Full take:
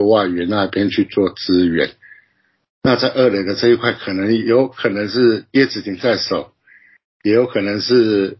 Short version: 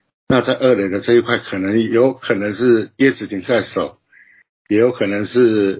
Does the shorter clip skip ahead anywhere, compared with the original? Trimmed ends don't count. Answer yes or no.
no